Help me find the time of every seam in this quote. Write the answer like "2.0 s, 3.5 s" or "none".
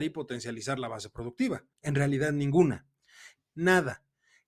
1.7 s, 3.4 s